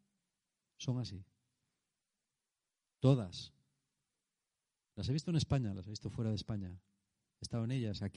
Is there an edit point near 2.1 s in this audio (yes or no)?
no